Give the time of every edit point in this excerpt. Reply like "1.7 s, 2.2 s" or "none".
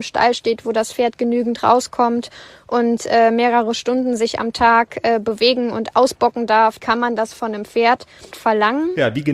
6.8 s, 8.3 s